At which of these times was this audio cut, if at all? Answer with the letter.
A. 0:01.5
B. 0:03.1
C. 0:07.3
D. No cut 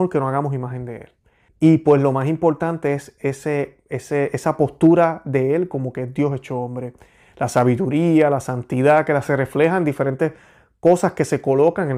A